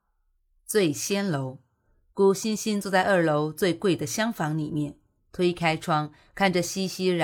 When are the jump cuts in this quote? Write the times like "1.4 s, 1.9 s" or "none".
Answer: none